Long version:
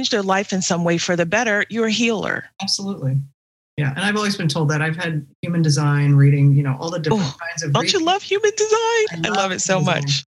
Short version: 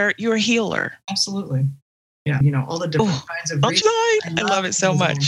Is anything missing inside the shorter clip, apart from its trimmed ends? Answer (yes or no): yes